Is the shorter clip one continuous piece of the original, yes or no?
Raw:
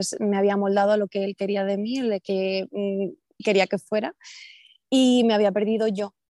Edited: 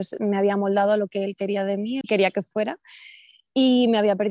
no